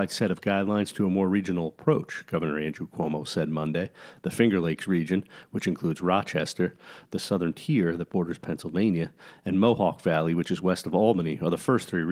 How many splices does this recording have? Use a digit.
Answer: 0